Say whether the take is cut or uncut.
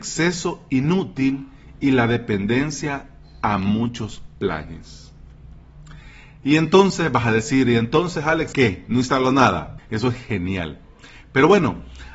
cut